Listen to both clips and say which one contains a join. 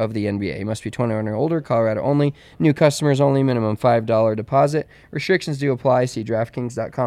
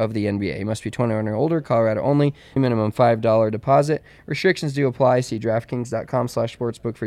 second; 1 cut; at 2.6 s

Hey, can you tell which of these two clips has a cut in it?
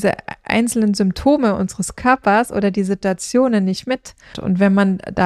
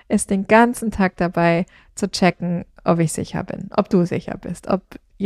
first; 1 cut; at 4.3 s

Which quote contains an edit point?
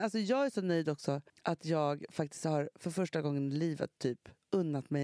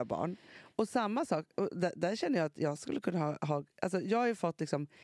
first; 1 cut; at 1.3 s

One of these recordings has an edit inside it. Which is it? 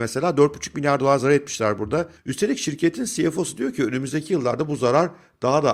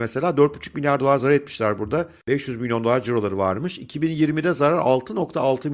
first; 1 cut; at 2.2 s

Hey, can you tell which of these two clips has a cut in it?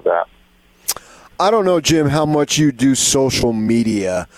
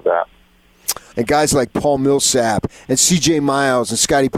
second; 1 cut; at 1.1 s

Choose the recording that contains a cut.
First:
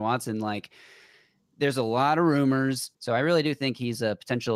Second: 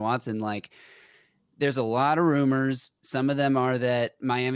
first; 1 cut; at 2.9 s

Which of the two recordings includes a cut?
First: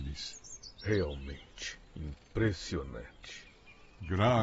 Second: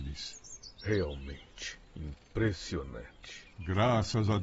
second; 1 cut; at 3.5 s

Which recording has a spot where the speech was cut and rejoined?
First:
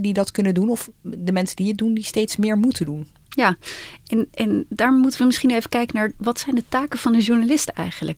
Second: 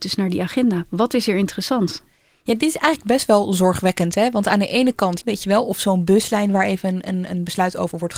second; 1 cut; at 5.2 s

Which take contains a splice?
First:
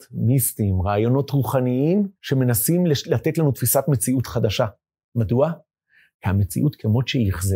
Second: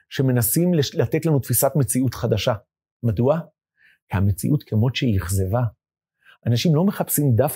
first; 1 cut; at 2.2 s

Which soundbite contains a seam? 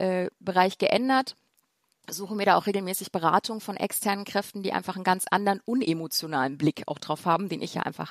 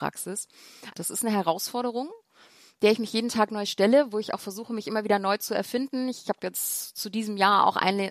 second; 1 cut; at 0.9 s

